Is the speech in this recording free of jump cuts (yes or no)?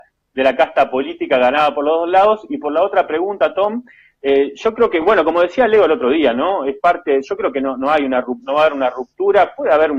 yes